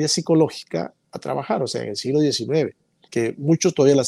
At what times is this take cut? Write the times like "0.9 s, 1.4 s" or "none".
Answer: 3.1 s